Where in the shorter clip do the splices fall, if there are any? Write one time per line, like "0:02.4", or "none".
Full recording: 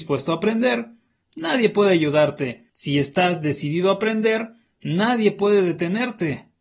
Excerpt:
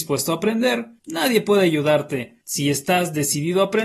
0:01.0